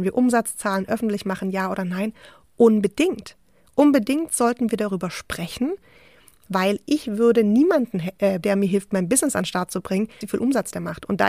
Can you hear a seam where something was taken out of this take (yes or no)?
yes